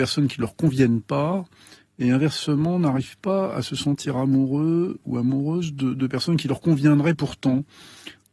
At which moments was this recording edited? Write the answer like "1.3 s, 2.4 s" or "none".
none